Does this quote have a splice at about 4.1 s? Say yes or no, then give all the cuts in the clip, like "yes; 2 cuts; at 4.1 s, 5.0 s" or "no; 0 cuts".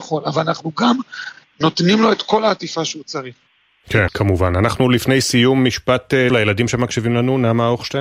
yes; 2 cuts; at 4.1 s, 6.3 s